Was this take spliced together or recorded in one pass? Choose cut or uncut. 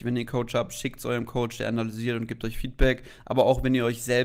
uncut